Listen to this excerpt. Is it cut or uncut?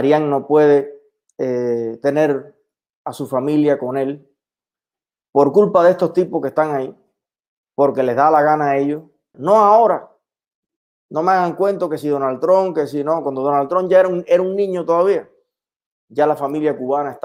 cut